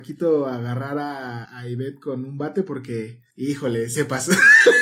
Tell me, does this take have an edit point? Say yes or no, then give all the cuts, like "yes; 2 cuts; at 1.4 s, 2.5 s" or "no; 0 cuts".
yes; 1 cut; at 1.4 s